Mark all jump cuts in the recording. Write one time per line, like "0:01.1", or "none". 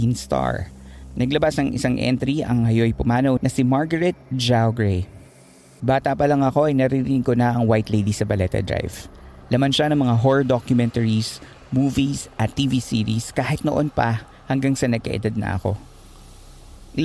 0:03.4
0:05.8